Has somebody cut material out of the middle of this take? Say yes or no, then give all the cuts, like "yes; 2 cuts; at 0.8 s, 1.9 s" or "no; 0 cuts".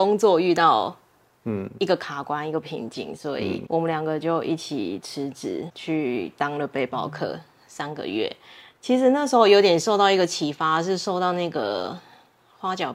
no; 0 cuts